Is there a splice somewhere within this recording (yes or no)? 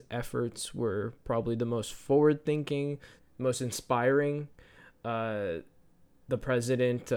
yes